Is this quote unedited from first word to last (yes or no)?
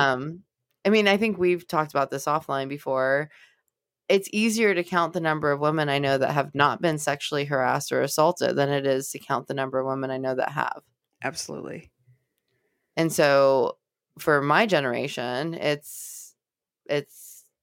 yes